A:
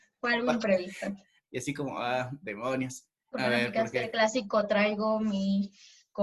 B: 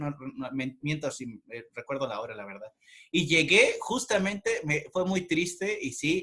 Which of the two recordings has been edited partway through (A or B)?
A